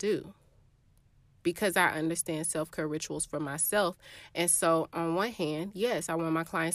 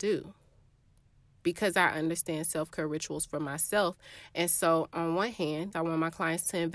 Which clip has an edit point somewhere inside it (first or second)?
second